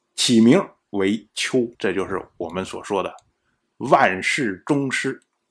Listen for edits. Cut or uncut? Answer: cut